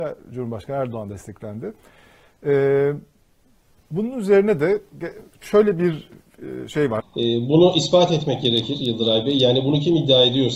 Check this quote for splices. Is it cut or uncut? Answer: cut